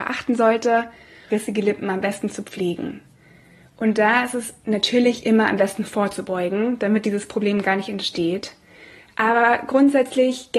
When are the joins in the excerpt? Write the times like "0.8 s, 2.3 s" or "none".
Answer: 1.3 s